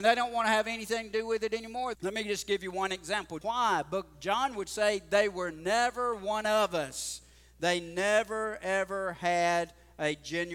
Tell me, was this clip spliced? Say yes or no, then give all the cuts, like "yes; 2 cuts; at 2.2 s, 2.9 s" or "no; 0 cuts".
yes; 2 cuts; at 1.9 s, 3.4 s